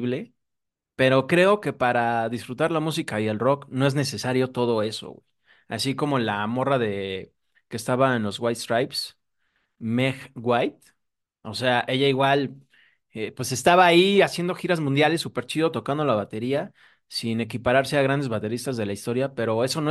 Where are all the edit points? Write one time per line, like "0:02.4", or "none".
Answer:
none